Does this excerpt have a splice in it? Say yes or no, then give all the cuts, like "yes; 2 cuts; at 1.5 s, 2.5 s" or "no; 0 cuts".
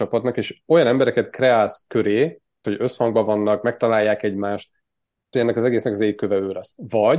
yes; 2 cuts; at 2.6 s, 5.3 s